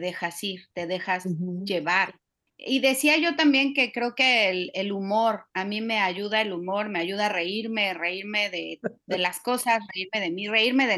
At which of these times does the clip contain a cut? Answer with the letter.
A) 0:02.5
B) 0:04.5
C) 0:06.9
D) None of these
A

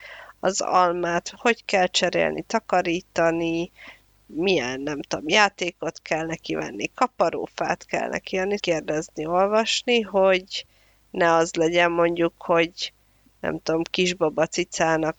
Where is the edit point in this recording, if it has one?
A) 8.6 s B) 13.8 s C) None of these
A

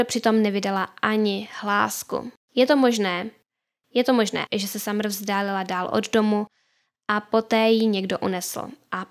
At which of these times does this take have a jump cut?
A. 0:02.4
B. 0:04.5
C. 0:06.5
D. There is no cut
B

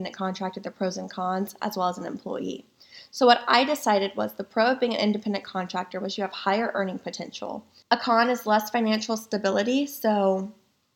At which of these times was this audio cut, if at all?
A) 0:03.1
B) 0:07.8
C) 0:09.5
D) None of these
B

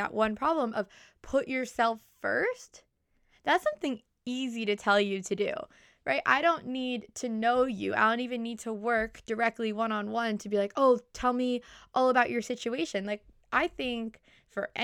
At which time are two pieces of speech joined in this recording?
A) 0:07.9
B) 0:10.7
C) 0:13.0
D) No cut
D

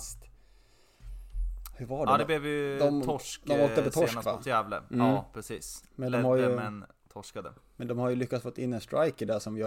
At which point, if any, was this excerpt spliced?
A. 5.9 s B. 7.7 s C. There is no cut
C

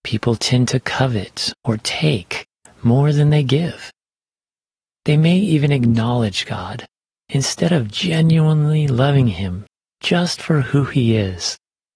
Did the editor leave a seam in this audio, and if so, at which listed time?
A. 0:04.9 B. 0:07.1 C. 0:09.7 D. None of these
B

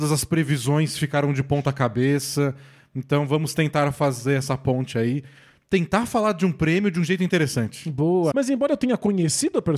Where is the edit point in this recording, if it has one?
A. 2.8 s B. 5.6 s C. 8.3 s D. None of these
C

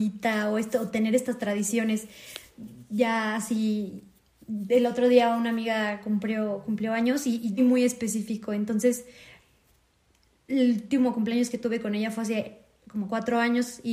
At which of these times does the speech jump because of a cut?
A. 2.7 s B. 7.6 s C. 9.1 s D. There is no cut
B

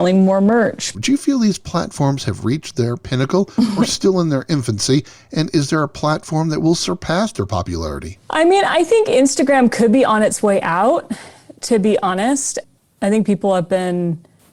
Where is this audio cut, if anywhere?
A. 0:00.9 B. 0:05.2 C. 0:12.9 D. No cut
A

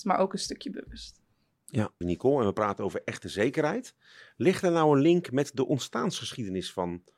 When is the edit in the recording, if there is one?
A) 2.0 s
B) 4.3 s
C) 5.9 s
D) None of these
A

